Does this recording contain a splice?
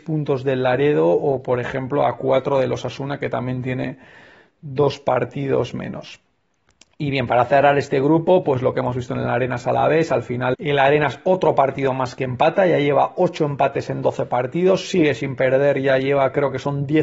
yes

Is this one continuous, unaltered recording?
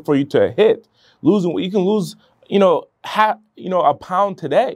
yes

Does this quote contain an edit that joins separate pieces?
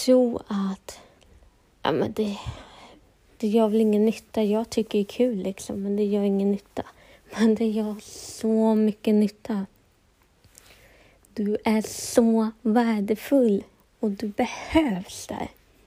no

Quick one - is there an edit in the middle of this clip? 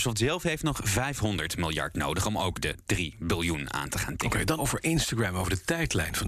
yes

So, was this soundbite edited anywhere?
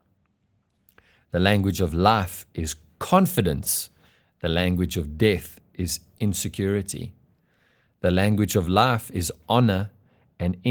no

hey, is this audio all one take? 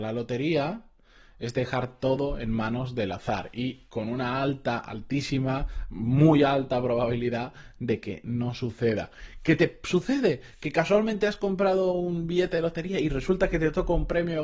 yes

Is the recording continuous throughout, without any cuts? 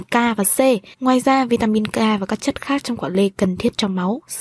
no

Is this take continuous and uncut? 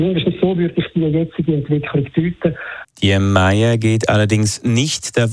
no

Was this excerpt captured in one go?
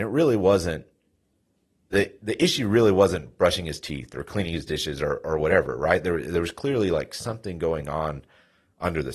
yes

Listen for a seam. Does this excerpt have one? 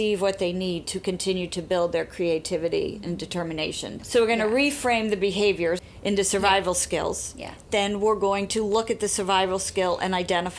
no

